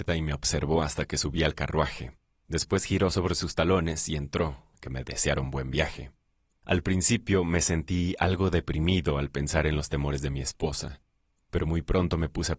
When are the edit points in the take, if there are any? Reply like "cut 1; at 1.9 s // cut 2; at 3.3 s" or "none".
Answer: cut 1; at 4.7 s